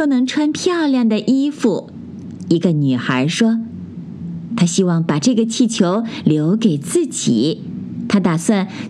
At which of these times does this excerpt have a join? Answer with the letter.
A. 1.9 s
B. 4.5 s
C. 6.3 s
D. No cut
B